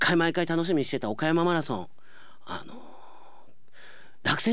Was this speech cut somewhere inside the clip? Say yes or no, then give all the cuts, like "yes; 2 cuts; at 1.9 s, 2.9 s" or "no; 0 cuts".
no; 0 cuts